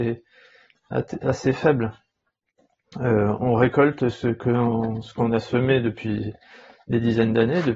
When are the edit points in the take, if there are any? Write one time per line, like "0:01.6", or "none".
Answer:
none